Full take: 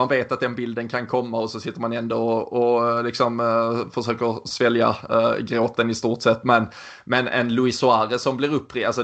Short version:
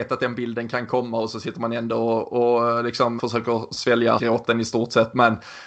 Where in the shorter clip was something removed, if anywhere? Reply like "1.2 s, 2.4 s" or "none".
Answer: 3.2 s, 4.2 s